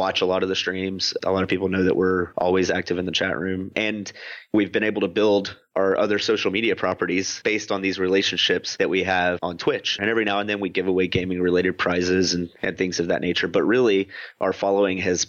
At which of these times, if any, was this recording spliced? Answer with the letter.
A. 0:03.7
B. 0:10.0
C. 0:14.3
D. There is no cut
B